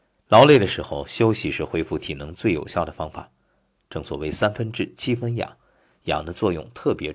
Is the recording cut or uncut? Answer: uncut